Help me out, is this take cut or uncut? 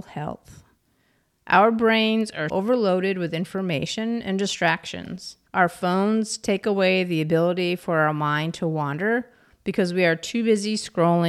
cut